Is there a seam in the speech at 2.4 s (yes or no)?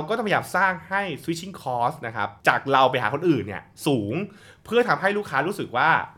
yes